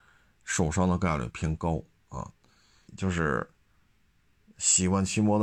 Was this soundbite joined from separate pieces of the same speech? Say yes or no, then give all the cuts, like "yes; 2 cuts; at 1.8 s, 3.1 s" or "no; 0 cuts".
yes; 1 cut; at 2.9 s